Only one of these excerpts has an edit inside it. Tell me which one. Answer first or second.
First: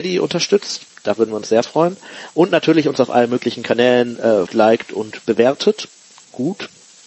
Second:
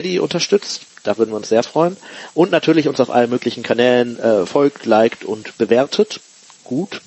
first